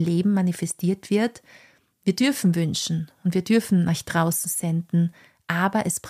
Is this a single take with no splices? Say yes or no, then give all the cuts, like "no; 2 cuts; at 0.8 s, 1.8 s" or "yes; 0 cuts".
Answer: yes; 0 cuts